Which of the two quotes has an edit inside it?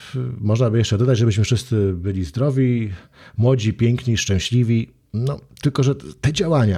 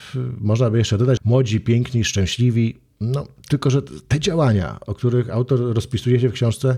second; 1 cut; at 1.2 s

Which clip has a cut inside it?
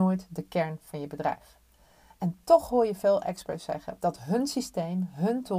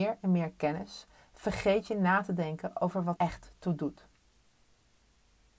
second; 1 cut; at 3.2 s

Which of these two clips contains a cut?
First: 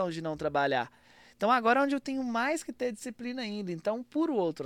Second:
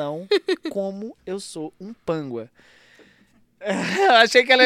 second; 1 cut; at 3.4 s

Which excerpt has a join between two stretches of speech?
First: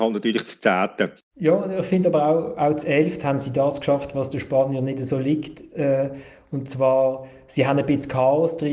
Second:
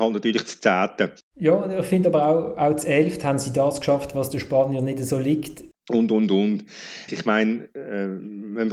second; 2 cuts; at 5.7 s, 7.1 s

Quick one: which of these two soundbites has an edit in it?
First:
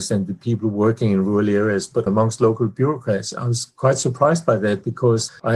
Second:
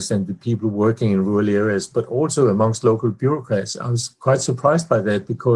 first; 1 cut; at 2.1 s

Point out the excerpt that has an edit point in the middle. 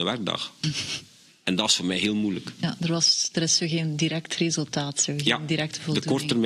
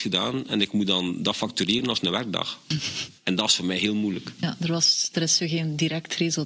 second; 1 cut; at 3.2 s

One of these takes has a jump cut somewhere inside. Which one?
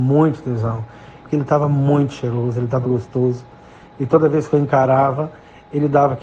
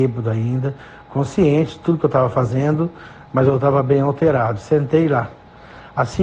first; 2 cuts; at 1.2 s, 2.8 s

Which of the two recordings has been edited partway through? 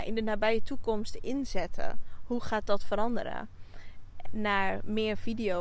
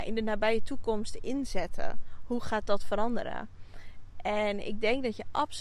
first; 1 cut; at 4.2 s

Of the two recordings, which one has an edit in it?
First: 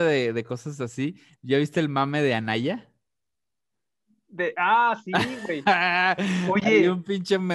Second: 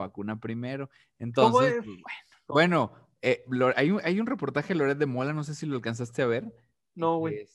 second; 1 cut; at 2.5 s

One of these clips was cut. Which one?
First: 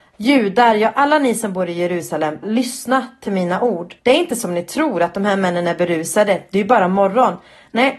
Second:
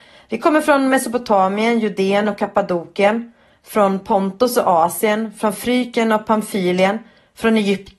first; 2 cuts; at 2.4 s, 4.0 s

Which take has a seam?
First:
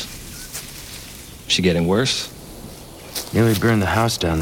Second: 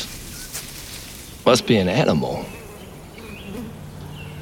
second; 2 cuts; at 1.4 s, 3.2 s

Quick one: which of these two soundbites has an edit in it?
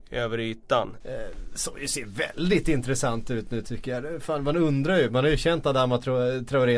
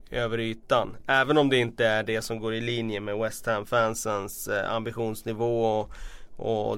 first; 1 cut; at 1.0 s

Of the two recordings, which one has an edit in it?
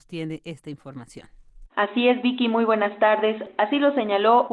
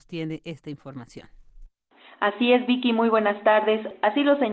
first; 1 cut; at 1.7 s

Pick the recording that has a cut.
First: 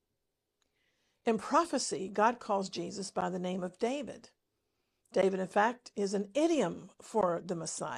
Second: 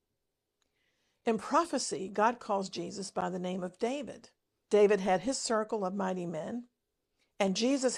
second; 1 cut; at 4.6 s

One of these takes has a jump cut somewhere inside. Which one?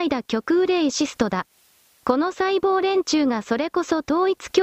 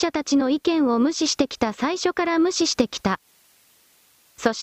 first; 1 cut; at 1.9 s

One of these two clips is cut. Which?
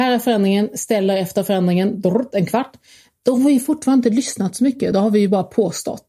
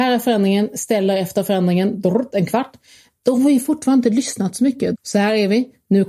second; 1 cut; at 4.9 s

